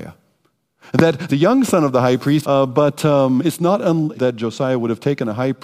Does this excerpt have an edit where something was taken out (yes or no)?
yes